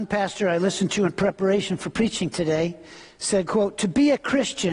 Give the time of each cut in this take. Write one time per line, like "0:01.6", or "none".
none